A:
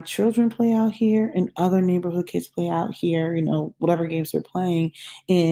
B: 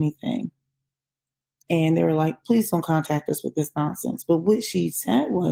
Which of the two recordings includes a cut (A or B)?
B